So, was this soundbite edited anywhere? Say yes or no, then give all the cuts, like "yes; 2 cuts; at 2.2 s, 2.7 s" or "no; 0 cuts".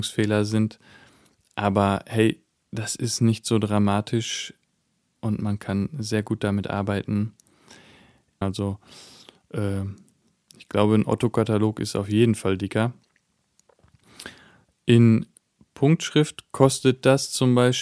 yes; 1 cut; at 8.4 s